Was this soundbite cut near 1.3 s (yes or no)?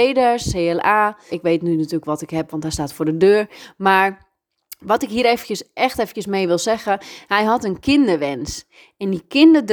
yes